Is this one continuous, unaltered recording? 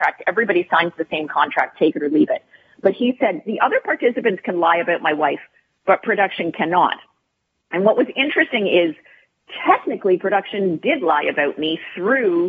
yes; 0 cuts

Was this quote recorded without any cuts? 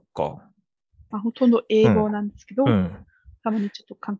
no; 1 cut; at 1.1 s

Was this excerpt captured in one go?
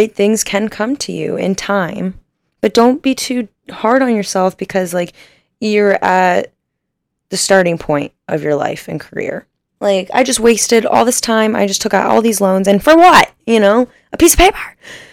no; 1 cut; at 9.8 s

